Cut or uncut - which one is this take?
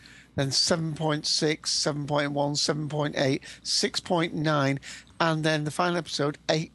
uncut